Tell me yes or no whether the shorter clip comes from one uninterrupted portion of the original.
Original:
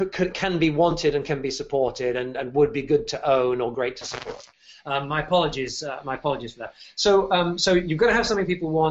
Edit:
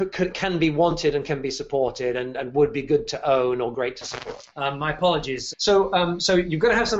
no